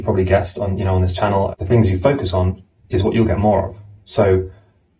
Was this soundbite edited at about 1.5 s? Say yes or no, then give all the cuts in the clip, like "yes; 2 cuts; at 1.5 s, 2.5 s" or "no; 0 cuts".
yes; 1 cut; at 1.5 s